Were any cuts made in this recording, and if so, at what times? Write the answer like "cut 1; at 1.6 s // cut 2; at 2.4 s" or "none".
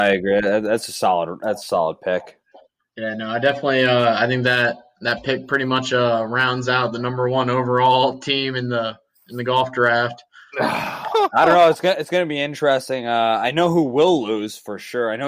none

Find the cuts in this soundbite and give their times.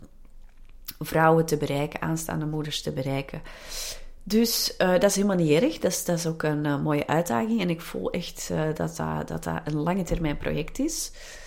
none

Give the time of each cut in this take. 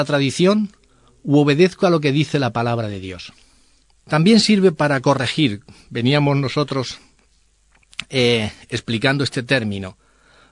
cut 1; at 4.0 s

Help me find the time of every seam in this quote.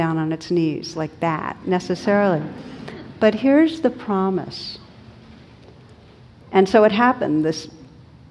cut 1; at 6.4 s

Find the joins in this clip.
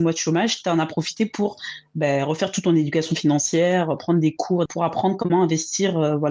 cut 1; at 4.7 s

